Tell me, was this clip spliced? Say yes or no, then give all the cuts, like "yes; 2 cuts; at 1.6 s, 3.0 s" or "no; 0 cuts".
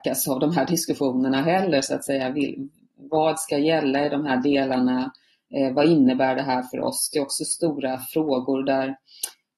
no; 0 cuts